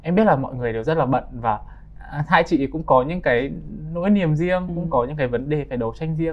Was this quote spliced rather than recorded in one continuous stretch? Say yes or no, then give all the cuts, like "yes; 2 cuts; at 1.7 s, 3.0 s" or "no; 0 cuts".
no; 0 cuts